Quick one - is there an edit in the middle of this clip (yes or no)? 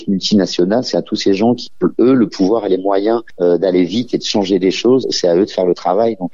yes